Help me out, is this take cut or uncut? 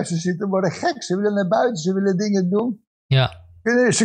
uncut